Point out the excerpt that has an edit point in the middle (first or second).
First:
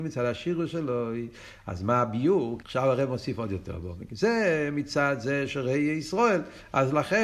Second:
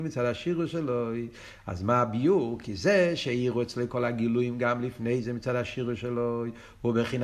first